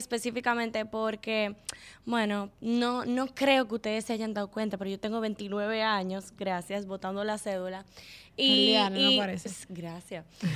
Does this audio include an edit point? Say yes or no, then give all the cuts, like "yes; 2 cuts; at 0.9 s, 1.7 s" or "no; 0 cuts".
no; 0 cuts